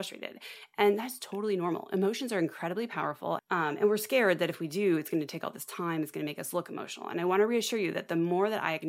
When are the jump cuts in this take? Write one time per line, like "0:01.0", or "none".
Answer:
0:03.4